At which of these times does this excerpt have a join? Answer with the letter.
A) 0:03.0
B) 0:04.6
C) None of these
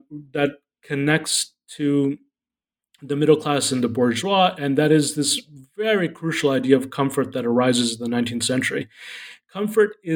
C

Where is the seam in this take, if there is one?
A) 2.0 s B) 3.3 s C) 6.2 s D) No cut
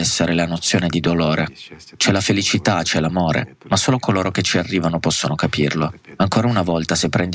D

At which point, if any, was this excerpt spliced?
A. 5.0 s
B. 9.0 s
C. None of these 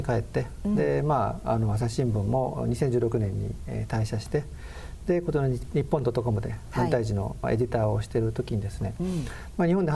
C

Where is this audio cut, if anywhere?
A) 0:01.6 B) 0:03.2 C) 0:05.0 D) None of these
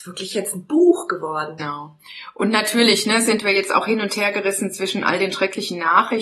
A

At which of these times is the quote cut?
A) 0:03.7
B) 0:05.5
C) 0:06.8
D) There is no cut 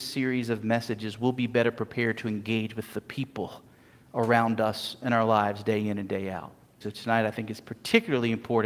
C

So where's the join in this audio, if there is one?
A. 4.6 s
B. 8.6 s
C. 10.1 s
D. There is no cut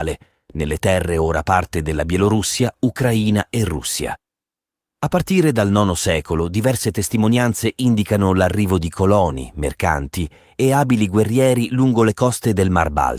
D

